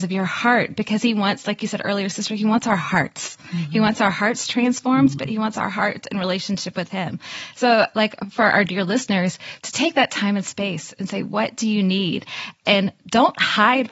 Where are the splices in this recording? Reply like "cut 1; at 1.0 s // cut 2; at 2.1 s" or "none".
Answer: none

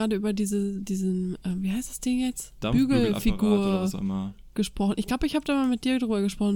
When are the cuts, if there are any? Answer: none

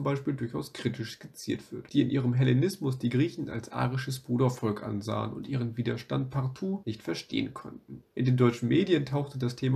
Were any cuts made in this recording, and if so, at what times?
cut 1; at 1.9 s

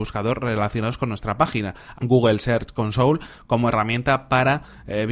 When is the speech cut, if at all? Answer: cut 1; at 1.9 s

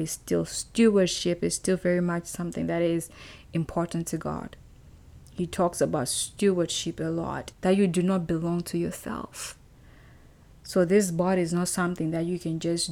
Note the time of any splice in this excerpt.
cut 1; at 7.5 s

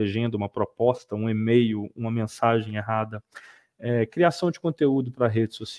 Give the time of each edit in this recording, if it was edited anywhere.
none

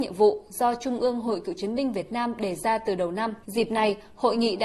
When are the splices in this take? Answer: cut 1; at 3.4 s

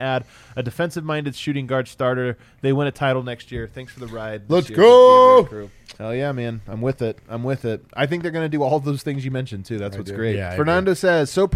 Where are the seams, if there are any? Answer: cut 1; at 6.0 s

